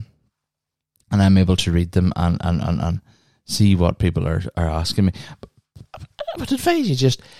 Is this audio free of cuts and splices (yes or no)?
yes